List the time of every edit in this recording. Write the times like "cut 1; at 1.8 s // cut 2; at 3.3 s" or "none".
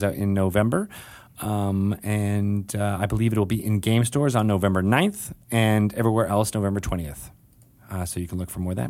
none